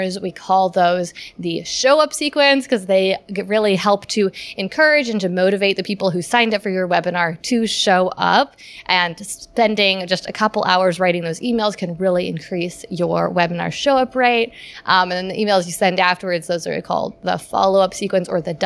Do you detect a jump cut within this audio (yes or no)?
no